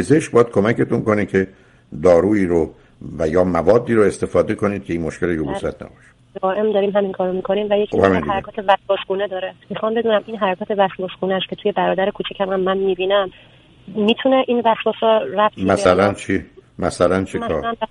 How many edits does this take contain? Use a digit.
1